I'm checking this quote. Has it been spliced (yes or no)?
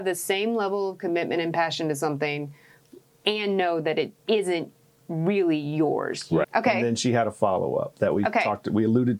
yes